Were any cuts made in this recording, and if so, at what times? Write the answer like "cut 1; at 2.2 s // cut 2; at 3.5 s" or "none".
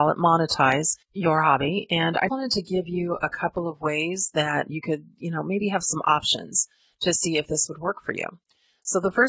cut 1; at 1.0 s // cut 2; at 2.3 s